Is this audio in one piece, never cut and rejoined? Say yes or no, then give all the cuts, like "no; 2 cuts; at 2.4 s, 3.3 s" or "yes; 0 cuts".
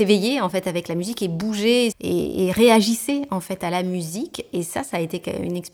no; 1 cut; at 1.9 s